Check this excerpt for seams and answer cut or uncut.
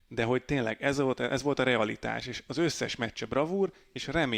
uncut